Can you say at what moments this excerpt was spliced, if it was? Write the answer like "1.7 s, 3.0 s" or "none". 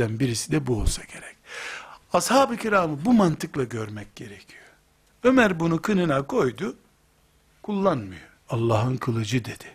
5.1 s, 8.4 s